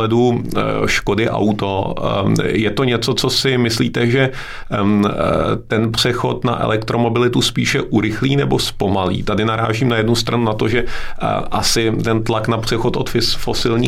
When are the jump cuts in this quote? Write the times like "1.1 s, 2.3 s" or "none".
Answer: none